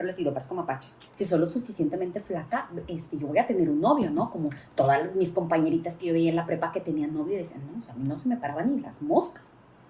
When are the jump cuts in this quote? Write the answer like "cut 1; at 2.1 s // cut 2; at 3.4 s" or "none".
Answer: cut 1; at 1.1 s